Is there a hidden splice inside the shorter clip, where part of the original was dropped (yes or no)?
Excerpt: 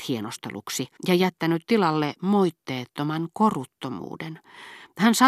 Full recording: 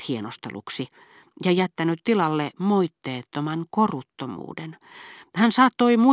yes